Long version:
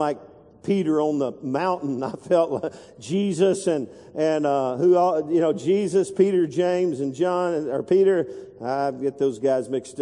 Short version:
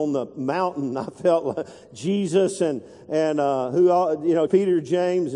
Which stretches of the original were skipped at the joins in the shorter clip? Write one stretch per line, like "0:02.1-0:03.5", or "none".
0:05.5-0:06.1